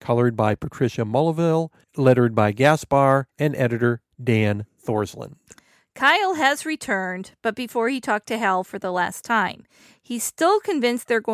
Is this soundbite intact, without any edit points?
no; 1 cut; at 3.3 s

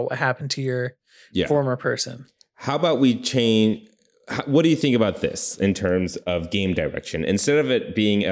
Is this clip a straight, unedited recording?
yes; 0 cuts

